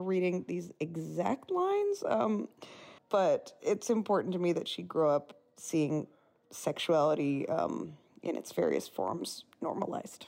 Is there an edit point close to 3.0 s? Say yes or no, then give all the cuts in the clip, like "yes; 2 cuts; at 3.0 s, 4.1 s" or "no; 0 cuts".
yes; 1 cut; at 3.0 s